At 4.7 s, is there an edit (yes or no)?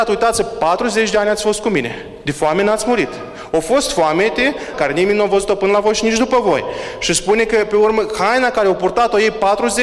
yes